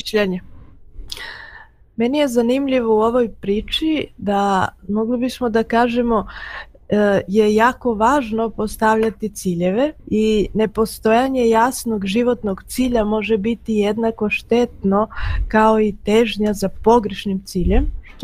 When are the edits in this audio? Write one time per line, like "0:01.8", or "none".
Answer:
0:10.0